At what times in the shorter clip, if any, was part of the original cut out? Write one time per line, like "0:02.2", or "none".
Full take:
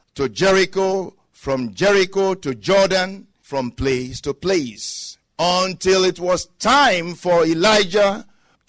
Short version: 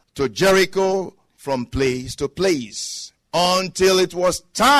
0:01.3